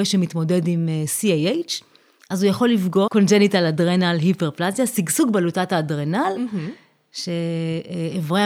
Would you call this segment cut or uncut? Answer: cut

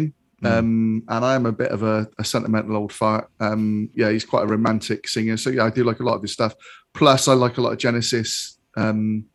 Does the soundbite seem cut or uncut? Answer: cut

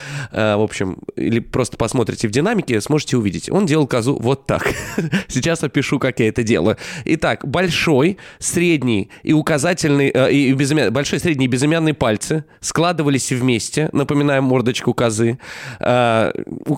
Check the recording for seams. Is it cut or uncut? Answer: uncut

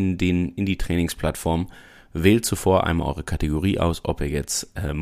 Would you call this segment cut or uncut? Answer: uncut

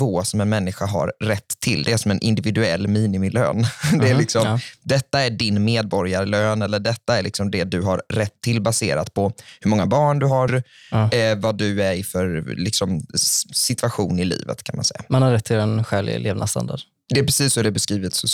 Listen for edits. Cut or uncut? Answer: cut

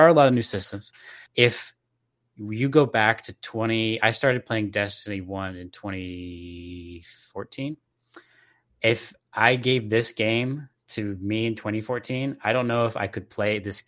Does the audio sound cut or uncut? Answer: cut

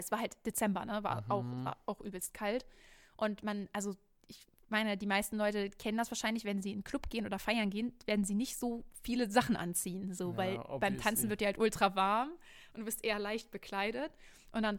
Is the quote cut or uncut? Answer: uncut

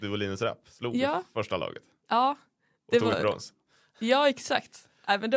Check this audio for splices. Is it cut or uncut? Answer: uncut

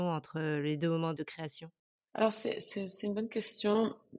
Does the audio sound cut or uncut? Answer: uncut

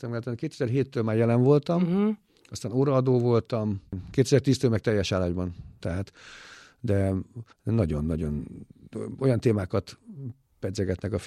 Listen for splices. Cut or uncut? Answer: cut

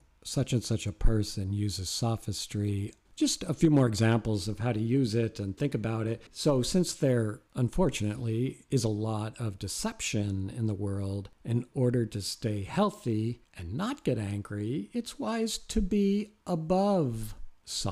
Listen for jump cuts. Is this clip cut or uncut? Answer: cut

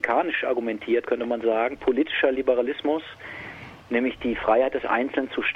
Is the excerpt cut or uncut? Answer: uncut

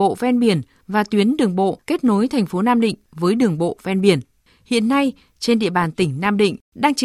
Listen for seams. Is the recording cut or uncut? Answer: cut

